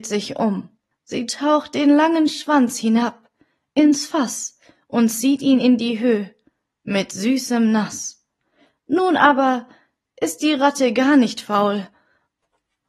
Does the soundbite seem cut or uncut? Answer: uncut